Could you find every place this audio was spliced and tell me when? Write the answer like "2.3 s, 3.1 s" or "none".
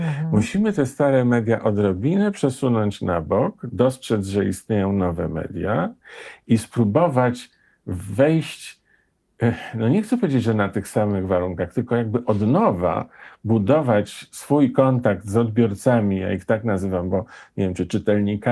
none